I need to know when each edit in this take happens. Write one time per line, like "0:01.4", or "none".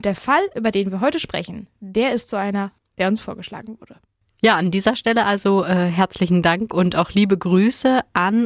none

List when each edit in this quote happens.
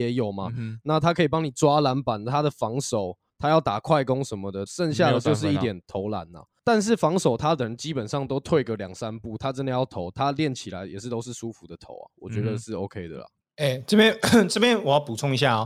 0:04.7

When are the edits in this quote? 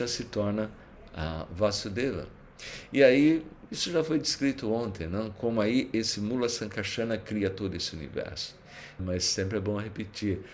0:09.0

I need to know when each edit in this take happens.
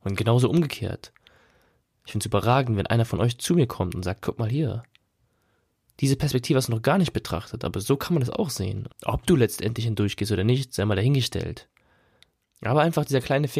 0:08.9
0:12.4

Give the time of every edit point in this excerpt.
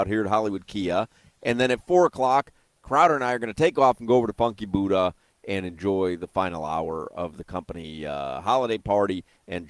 none

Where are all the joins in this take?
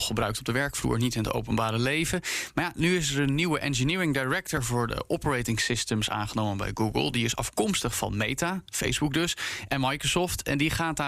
none

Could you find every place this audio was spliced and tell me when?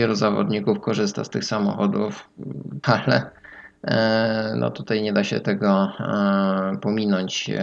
0:02.8

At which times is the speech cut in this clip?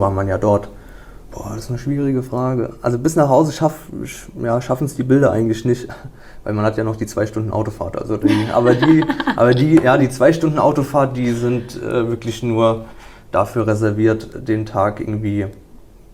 0:01.3

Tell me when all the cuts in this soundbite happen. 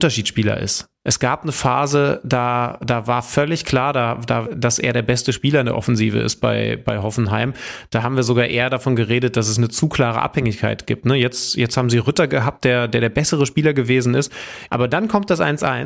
0:04.5
0:14.7

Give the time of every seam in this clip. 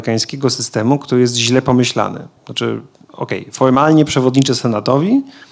0:02.4

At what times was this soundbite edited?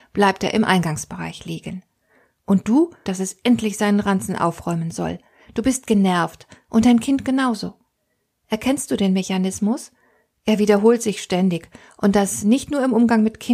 0:03.1

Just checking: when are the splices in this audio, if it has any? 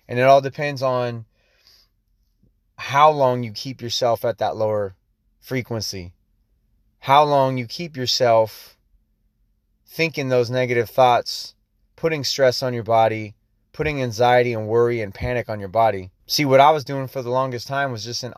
0:16.2

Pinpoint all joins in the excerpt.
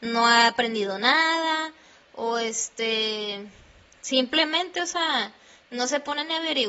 none

